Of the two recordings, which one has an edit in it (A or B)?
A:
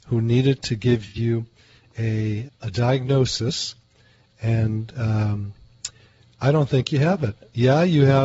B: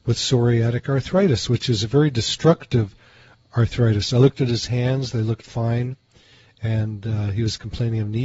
A